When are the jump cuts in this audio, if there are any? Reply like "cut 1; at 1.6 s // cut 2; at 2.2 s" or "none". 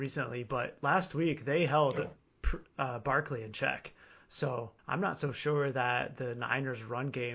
cut 1; at 4.8 s